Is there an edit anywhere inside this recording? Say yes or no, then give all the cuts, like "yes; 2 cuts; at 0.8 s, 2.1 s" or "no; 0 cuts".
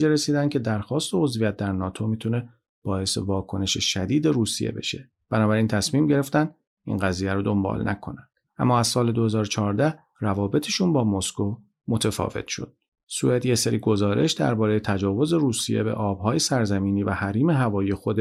no; 0 cuts